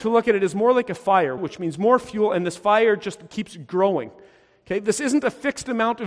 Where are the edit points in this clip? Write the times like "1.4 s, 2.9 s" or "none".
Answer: 1.4 s

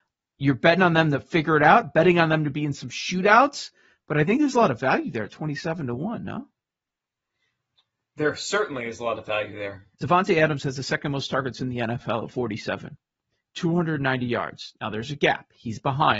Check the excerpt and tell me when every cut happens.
9.9 s

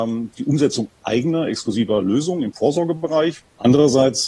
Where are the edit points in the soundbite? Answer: none

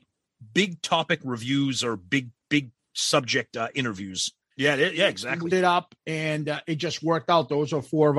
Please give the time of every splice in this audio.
4.5 s, 5.5 s

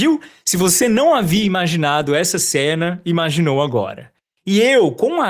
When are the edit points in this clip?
none

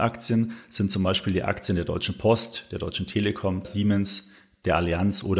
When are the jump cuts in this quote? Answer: 3.6 s

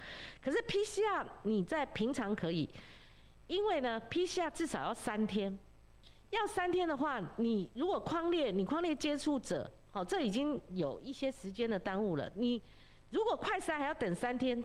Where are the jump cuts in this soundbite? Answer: none

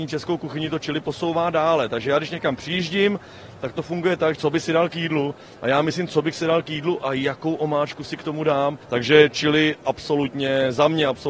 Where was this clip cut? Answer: 4.4 s, 8.8 s

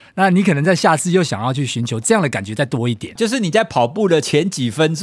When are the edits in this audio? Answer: 3.2 s

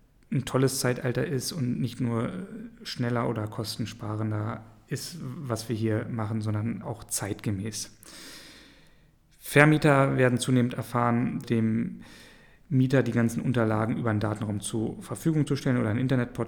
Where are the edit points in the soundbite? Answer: 6.8 s, 11.4 s

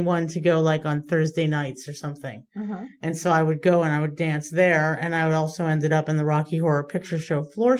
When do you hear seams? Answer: none

